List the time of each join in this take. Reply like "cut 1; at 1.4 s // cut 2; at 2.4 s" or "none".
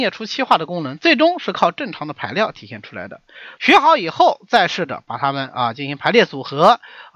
cut 1; at 3.6 s